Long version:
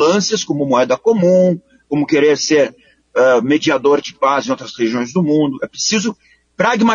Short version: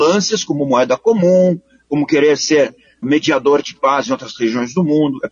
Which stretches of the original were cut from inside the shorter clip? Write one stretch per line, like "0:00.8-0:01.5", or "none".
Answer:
0:03.0-0:03.4

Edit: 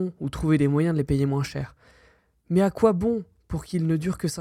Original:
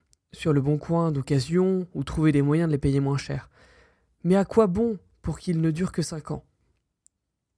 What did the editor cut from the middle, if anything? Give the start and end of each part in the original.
none

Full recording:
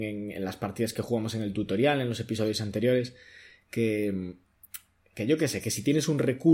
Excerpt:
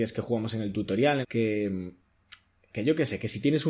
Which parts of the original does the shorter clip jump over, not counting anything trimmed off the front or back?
0:02.0-0:03.6

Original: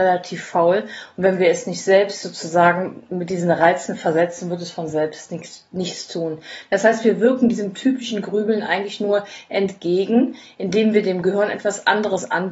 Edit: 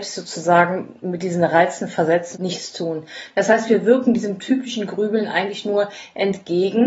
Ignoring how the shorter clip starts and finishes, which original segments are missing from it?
0:04.4-0:05.7

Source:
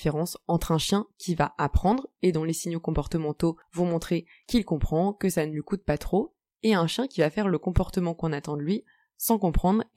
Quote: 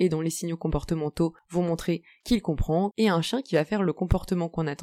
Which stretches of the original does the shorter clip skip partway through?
0:05.1-0:06.6

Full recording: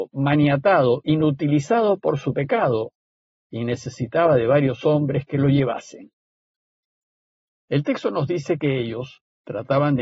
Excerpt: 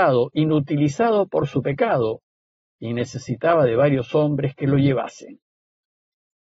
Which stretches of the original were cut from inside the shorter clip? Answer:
none

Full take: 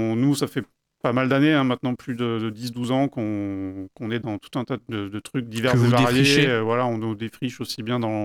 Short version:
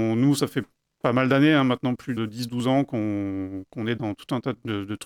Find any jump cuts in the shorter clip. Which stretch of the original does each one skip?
0:02.2-0:02.4

